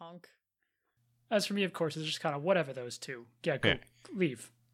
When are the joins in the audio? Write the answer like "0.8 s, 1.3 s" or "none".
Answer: none

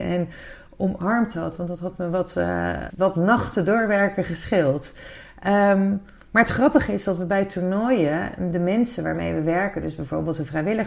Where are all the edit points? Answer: 2.9 s

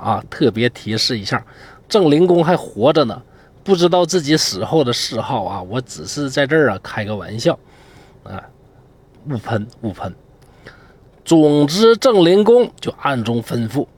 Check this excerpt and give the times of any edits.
none

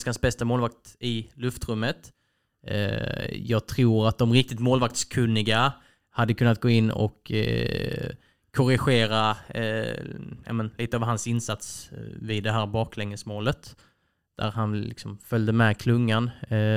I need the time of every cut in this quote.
none

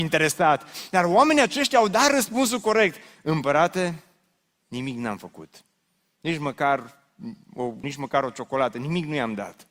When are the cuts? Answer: 7.8 s

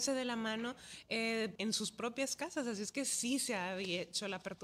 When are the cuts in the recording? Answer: 1.6 s

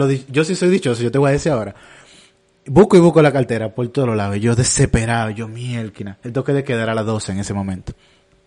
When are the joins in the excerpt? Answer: none

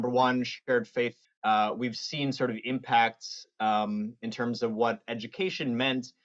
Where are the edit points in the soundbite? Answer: 1.2 s

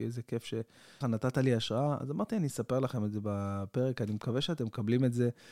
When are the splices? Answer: 1.0 s

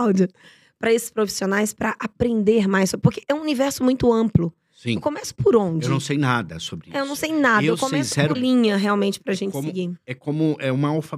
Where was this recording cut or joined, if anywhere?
8.3 s

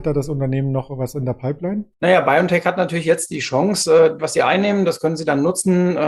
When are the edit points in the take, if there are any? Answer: 1.9 s, 4.2 s

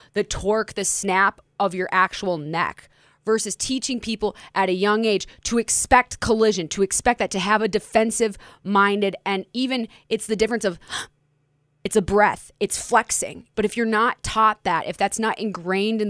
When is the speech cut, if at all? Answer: 13.5 s

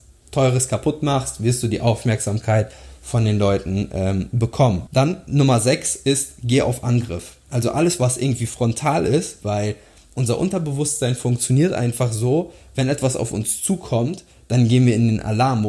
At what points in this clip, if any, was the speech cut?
4.9 s, 9.4 s

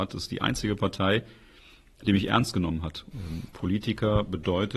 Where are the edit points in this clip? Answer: 3.1 s

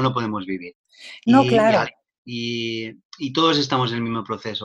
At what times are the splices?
2.2 s

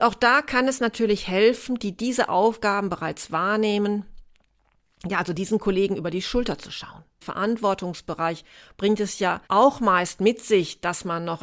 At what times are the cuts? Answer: 1.8 s, 7.2 s, 9.5 s

